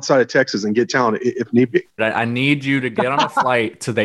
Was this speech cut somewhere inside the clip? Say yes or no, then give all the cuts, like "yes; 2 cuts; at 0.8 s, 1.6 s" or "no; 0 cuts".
yes; 1 cut; at 2.0 s